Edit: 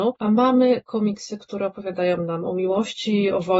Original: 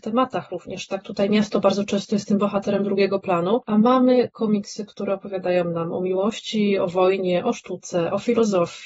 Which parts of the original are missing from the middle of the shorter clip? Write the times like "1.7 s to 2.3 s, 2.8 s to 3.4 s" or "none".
none